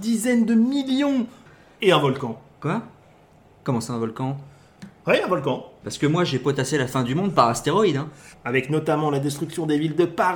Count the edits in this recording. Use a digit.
2